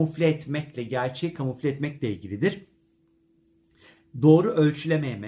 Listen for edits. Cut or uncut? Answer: uncut